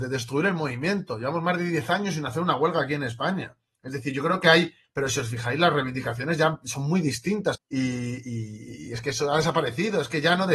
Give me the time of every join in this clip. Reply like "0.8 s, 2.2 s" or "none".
4.8 s, 7.5 s

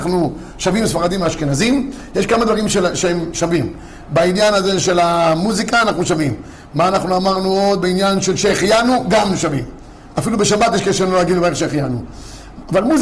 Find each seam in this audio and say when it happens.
none

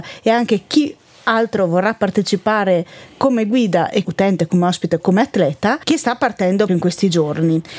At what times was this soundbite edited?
5.0 s, 6.7 s

